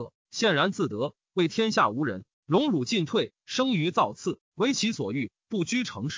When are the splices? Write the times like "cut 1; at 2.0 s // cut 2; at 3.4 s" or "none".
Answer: cut 1; at 2.3 s